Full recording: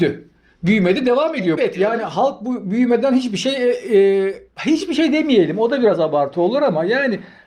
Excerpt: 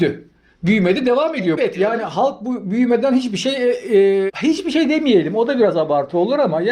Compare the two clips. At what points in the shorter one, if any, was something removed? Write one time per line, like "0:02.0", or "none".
0:04.3

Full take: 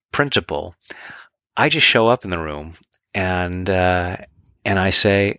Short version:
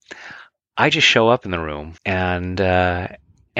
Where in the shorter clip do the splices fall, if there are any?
0:02.0

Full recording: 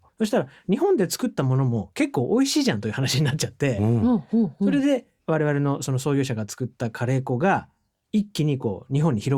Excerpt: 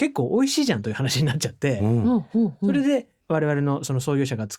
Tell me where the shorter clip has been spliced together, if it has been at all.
none

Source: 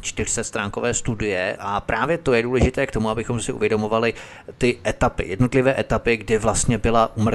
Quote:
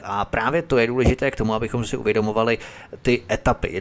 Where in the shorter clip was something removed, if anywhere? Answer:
none

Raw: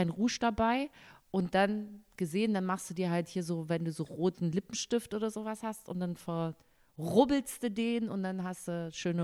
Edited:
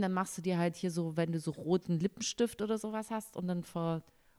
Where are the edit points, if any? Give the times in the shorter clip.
none

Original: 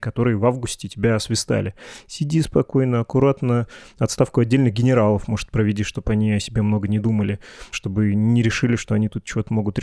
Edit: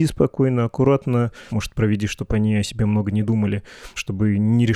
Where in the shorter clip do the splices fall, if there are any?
0:01.5

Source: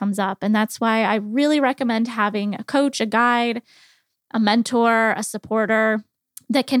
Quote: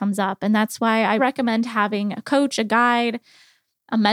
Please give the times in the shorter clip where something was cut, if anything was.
0:01.2

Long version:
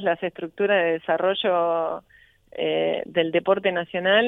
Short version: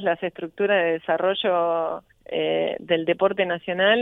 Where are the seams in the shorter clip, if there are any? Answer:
0:02.1

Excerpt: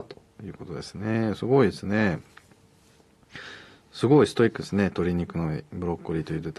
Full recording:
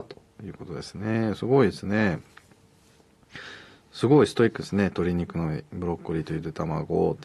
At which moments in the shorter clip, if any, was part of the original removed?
none

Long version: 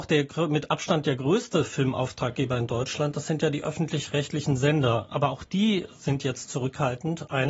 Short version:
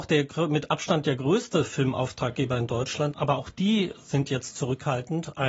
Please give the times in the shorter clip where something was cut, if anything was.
0:03.1

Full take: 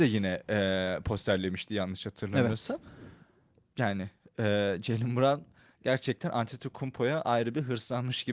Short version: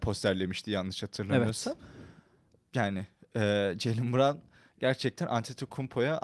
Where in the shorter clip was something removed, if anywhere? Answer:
none

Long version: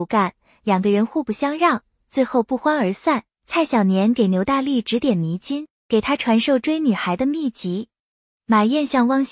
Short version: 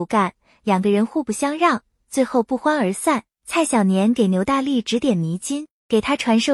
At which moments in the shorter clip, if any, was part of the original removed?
none

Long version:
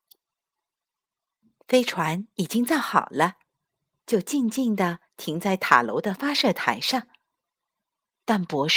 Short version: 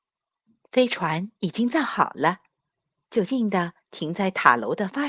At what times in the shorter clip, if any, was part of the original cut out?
0:03.2

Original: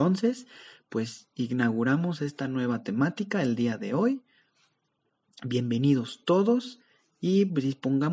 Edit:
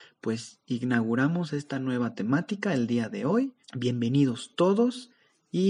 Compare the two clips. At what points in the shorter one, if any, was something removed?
0:03.6

